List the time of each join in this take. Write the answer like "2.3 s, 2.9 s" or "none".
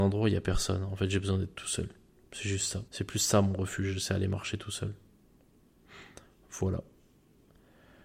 2.9 s